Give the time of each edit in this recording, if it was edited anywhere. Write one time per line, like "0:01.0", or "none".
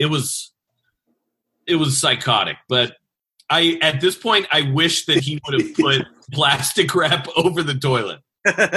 none